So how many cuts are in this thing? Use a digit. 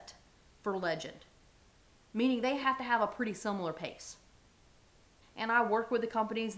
1